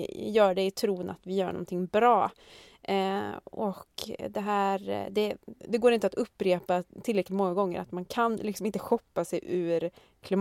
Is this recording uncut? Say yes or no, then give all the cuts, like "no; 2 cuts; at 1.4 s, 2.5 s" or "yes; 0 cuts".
no; 1 cut; at 5.6 s